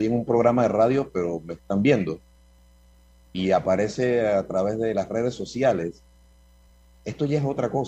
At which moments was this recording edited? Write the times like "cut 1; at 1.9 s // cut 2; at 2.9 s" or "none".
none